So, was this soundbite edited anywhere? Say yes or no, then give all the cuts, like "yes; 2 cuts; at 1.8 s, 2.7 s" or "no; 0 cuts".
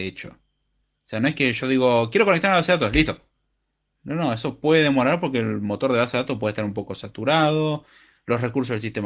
no; 0 cuts